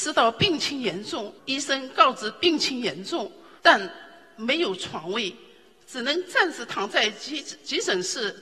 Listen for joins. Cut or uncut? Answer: cut